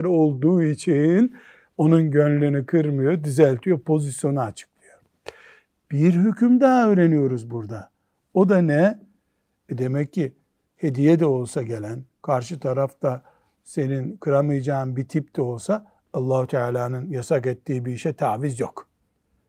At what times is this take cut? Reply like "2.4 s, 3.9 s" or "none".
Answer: none

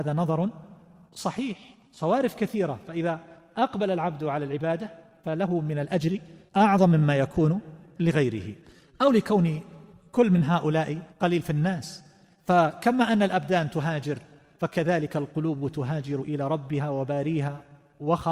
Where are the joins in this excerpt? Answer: 11.1 s

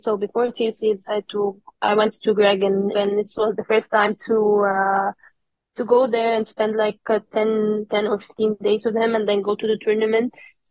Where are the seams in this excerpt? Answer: 2.9 s

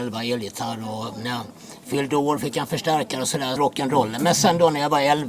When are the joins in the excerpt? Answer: 3.6 s

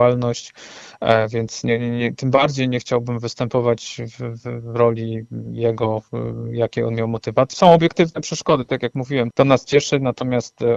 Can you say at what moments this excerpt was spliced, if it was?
7.5 s, 9.3 s

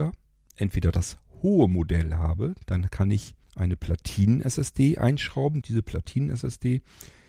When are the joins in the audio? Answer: 3.4 s, 5.6 s

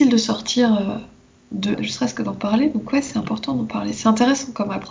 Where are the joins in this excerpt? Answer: 1.7 s

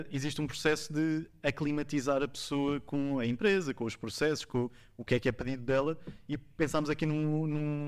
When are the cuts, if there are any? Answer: none

